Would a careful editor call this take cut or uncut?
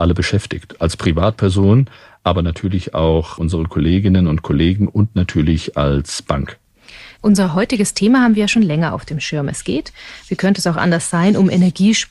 cut